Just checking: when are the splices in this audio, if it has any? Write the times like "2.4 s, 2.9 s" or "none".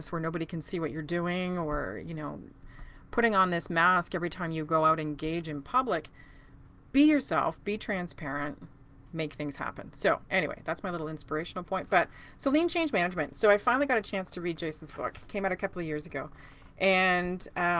none

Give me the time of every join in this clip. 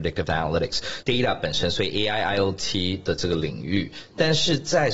1.0 s

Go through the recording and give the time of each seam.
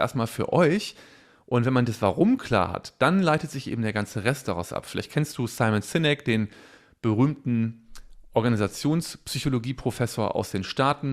none

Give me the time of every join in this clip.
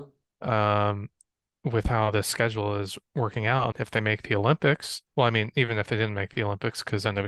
3.7 s, 5.1 s

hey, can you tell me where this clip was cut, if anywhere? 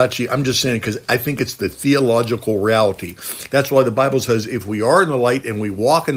none

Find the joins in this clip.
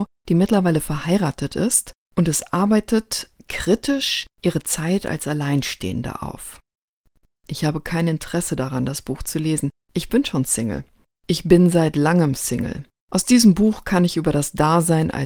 4.3 s

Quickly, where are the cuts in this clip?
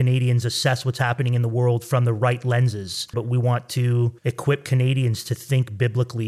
3.1 s, 4.2 s

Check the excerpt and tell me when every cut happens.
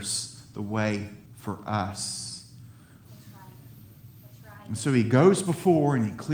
3.0 s

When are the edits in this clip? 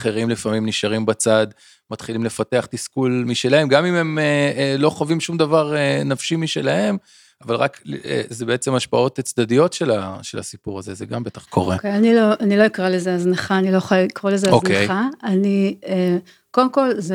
none

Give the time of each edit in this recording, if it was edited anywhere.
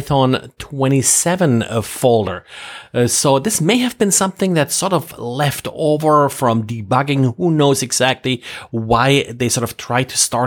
none

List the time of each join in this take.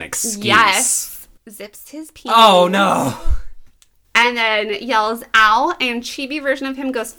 1.4 s

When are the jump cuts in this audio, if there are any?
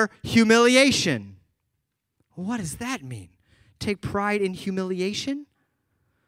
none

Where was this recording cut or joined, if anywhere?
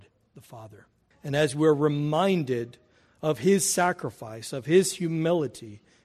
1.1 s

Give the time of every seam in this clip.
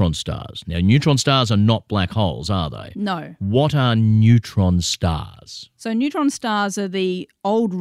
none

